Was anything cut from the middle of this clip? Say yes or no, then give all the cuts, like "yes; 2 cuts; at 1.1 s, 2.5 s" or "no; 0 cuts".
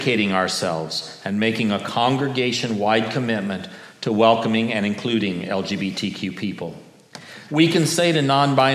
yes; 1 cut; at 7.5 s